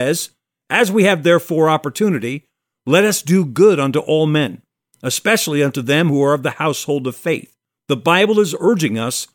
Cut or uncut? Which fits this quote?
uncut